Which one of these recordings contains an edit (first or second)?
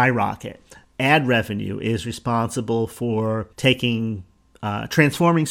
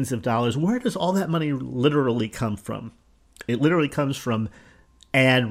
first